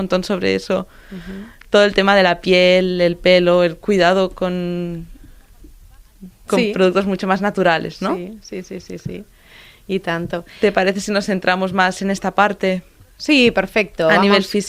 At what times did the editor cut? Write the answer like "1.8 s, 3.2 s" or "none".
none